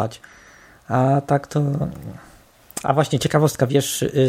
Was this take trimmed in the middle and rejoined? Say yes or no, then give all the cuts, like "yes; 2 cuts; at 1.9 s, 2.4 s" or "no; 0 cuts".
no; 0 cuts